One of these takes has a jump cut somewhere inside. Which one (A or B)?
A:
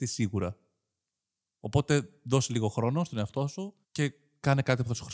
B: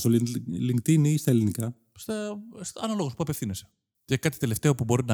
A